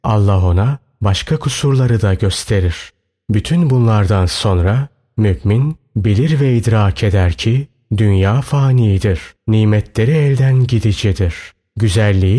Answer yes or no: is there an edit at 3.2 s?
no